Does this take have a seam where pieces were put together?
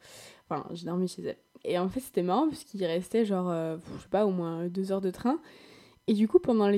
yes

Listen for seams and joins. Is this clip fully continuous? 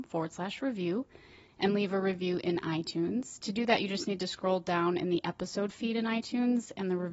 yes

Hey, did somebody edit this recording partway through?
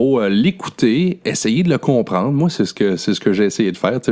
no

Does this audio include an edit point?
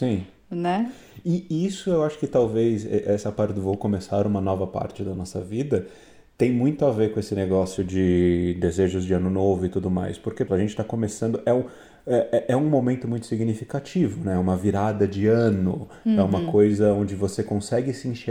yes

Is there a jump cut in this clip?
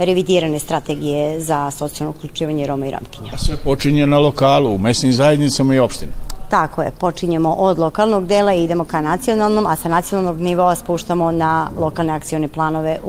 no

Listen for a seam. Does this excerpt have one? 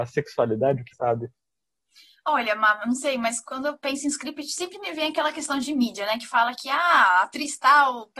yes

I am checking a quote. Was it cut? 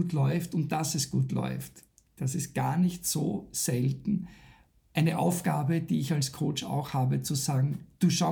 no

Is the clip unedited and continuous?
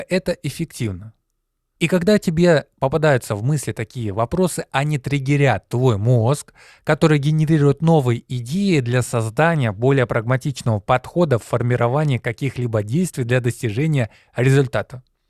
no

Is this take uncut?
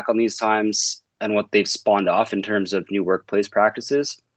yes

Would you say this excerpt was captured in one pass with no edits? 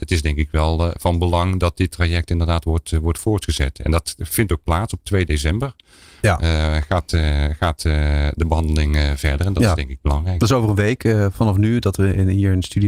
yes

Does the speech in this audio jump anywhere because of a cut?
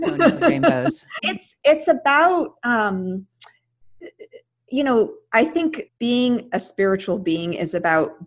yes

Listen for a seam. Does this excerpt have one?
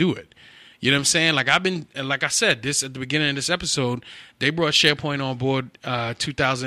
no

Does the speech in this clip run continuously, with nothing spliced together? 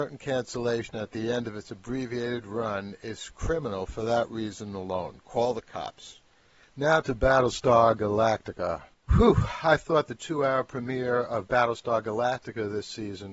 no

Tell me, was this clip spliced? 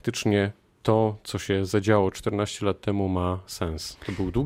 no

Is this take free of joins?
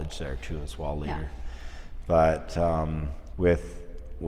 no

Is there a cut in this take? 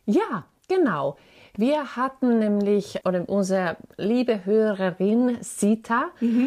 yes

